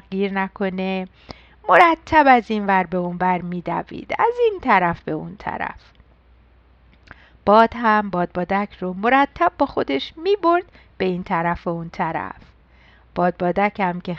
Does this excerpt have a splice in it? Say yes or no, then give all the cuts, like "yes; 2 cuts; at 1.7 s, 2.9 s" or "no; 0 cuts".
no; 0 cuts